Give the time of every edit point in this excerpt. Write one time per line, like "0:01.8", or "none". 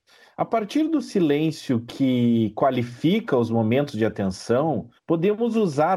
0:05.0